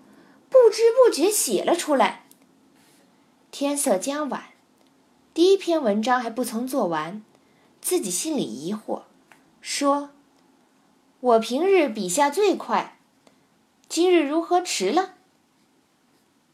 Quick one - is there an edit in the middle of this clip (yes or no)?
yes